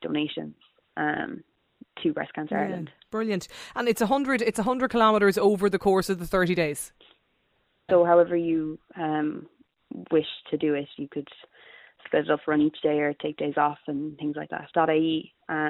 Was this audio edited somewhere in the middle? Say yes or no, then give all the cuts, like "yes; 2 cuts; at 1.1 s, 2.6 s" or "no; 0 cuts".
yes; 2 cuts; at 7.9 s, 14.7 s